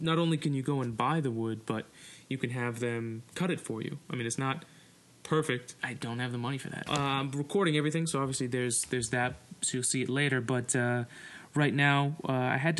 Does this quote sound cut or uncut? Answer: cut